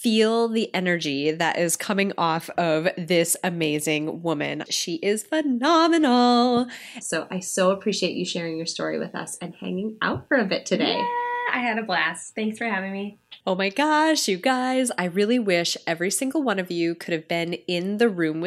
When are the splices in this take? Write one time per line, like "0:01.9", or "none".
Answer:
0:04.7
0:07.0
0:13.4